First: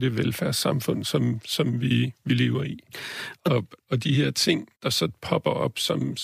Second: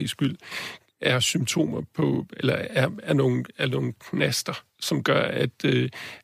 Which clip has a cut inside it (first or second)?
first